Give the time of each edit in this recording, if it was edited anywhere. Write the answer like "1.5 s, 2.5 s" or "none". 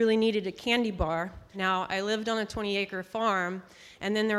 1.5 s